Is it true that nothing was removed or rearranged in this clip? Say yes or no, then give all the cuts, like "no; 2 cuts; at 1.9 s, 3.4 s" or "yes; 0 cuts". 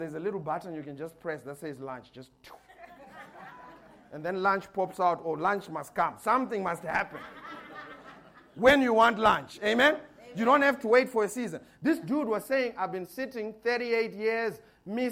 yes; 0 cuts